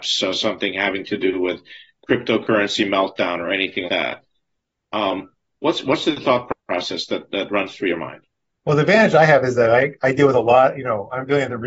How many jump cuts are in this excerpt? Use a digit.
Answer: 1